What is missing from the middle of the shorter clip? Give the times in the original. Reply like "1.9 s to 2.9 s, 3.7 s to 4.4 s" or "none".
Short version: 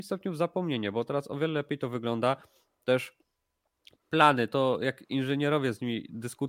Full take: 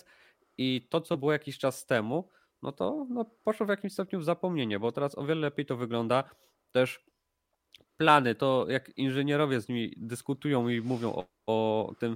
none